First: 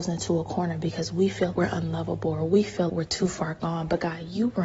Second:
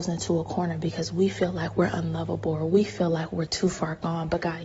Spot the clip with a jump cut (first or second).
first